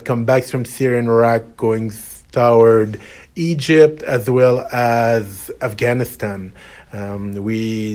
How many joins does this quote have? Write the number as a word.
one